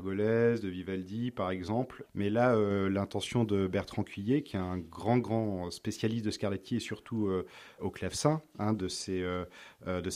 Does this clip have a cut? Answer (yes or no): no